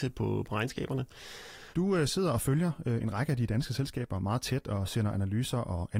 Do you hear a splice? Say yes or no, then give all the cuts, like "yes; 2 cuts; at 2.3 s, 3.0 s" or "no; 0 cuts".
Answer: yes; 1 cut; at 1.7 s